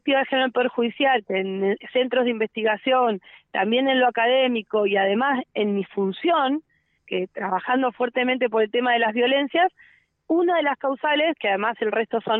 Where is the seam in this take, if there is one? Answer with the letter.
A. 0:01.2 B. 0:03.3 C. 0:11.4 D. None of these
A